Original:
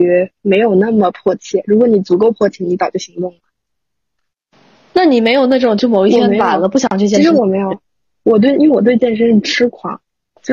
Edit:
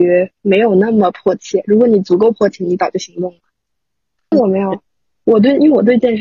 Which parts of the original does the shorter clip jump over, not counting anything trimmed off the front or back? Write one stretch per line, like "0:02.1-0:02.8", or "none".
0:04.3-0:07.3

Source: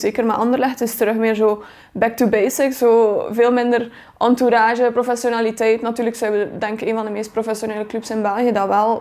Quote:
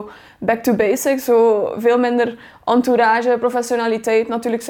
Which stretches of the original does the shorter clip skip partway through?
none

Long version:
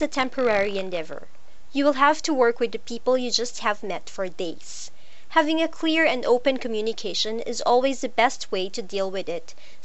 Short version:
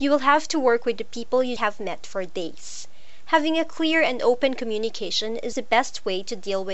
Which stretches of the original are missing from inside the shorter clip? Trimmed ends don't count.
0:03.3-0:03.6
0:07.6-0:08.0

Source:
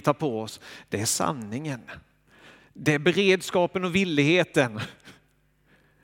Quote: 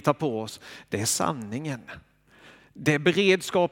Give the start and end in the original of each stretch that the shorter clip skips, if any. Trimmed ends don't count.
none

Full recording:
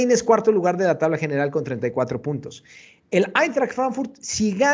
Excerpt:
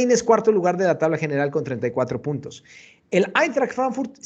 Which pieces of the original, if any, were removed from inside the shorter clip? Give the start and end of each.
none

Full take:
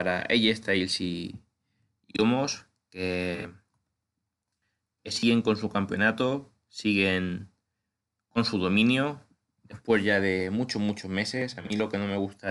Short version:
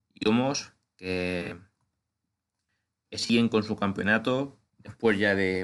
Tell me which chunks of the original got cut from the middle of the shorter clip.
0:06.6-0:09.5

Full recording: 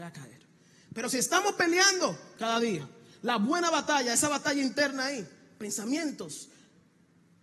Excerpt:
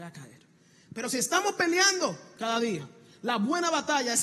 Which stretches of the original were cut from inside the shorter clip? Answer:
none

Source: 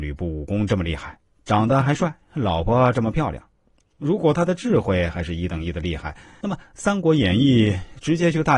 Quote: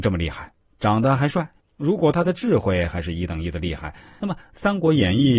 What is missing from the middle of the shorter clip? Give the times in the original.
0:02.3-0:03.8

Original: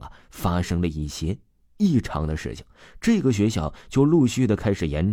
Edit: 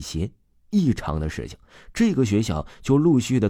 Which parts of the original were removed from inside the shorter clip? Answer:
none

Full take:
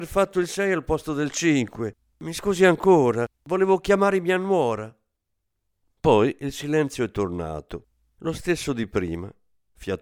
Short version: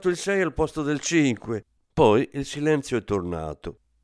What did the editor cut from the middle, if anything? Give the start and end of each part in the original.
0:02.1-0:05.8

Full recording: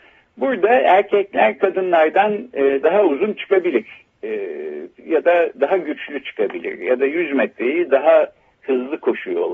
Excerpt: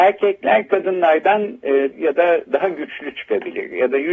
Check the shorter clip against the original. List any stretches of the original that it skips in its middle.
0:02.8-0:05.0

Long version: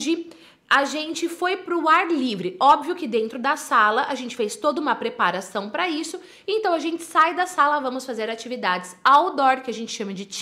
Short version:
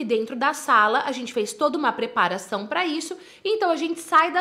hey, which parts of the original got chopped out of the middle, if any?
none

